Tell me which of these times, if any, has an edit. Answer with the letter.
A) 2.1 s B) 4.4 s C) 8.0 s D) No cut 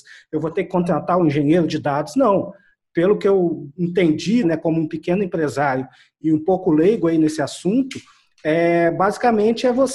B